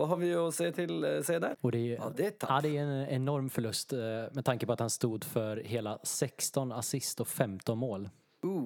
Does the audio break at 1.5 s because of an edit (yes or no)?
yes